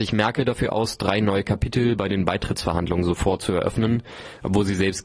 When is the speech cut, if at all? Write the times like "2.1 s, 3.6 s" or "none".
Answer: none